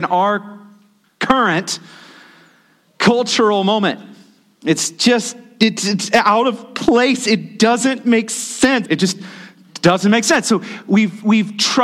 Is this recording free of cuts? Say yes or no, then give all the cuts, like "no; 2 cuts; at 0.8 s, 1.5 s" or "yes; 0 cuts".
no; 1 cut; at 8.8 s